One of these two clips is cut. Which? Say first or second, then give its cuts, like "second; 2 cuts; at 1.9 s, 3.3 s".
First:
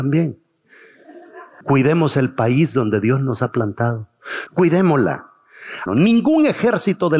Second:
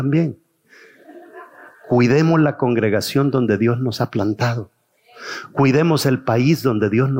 first; 3 cuts; at 1.6 s, 4.5 s, 5.9 s